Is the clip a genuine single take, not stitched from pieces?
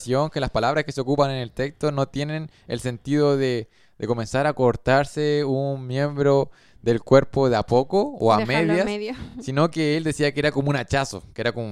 yes; 0 cuts

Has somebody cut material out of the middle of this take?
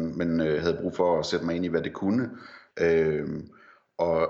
yes; 1 cut; at 2.7 s

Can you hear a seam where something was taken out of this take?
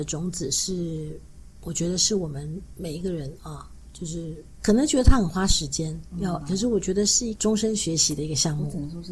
yes; 1 cut; at 6.4 s

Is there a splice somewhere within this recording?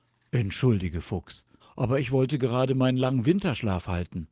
yes; 1 cut; at 1.6 s

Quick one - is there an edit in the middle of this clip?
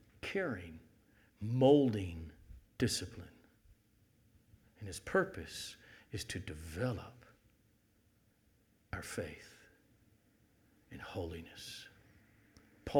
yes; 2 cuts; at 1.3 s, 2.7 s

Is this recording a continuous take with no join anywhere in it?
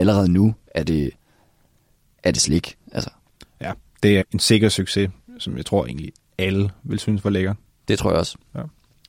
no; 1 cut; at 4.2 s

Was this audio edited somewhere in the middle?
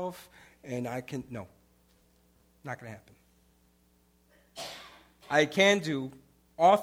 no; 0 cuts

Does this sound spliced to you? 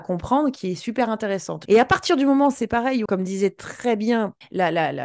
yes; 2 cuts; at 1.7 s, 3.1 s

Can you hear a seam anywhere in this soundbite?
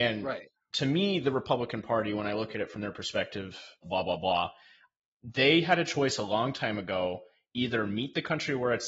yes; 1 cut; at 3.8 s

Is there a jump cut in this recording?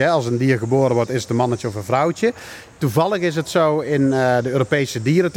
no; 0 cuts

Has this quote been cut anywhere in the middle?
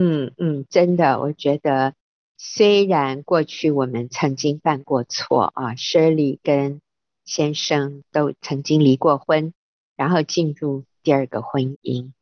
no; 0 cuts

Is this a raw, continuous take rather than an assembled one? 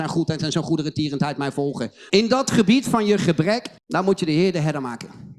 no; 2 cuts; at 2.1 s, 3.8 s

